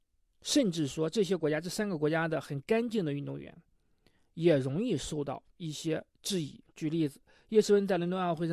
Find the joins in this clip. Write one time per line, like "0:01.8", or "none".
0:06.7

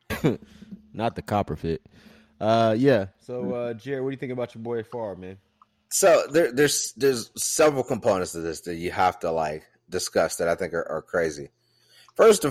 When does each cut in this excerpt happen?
none

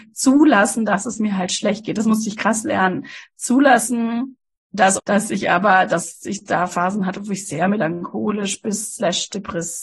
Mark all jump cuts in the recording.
0:05.0

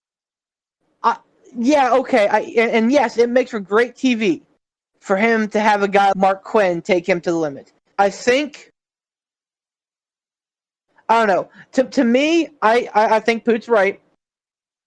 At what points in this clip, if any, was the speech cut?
0:06.1
0:07.9

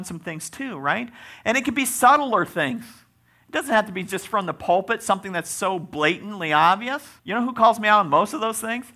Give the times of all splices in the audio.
0:07.2

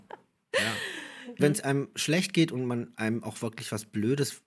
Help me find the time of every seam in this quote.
0:01.4

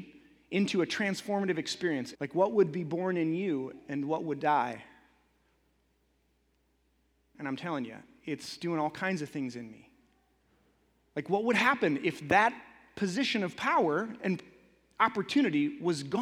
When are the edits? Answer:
0:02.1
0:07.3

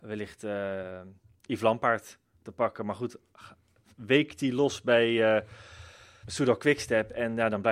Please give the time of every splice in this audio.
0:06.2

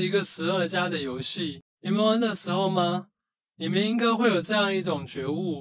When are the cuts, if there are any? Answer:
none

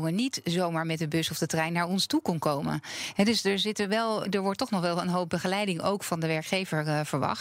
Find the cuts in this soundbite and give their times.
0:04.2

